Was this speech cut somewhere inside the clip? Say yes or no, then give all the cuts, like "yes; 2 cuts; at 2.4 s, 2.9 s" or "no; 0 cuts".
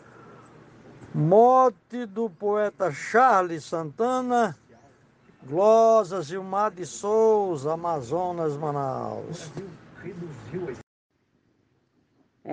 no; 0 cuts